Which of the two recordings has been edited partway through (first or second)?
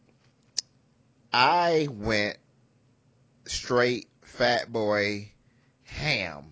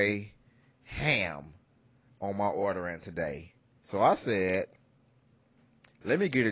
second